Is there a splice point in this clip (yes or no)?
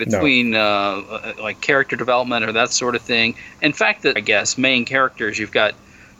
yes